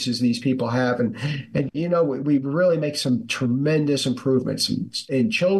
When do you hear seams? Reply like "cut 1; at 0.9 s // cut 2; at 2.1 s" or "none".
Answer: none